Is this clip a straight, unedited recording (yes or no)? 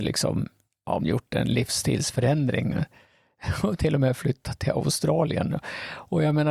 no